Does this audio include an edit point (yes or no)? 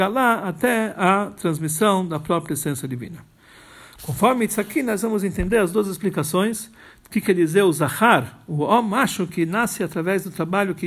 no